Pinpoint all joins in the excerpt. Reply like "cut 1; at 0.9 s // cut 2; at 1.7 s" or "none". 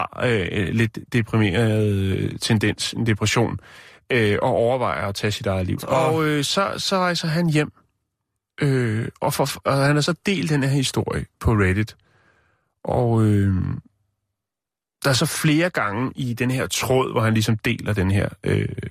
cut 1; at 5.8 s // cut 2; at 16.1 s